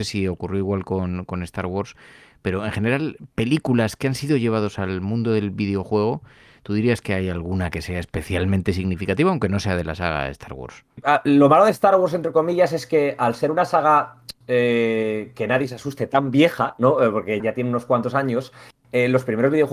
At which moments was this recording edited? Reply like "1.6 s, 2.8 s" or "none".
17.4 s